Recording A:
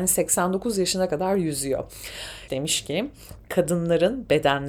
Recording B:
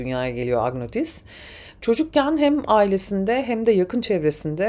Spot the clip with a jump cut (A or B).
A